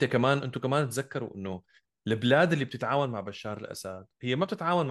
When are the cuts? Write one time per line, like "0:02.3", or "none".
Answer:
none